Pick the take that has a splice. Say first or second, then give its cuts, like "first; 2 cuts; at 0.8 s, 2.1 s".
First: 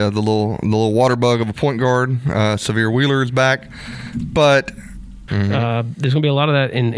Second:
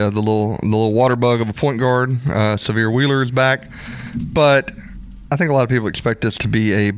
first; 1 cut; at 5.3 s